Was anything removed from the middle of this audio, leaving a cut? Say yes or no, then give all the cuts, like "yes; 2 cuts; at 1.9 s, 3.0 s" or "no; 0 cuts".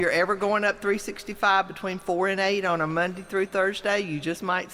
no; 0 cuts